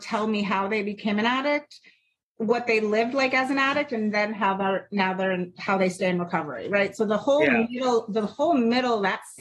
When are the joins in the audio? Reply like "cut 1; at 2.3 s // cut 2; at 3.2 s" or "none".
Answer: none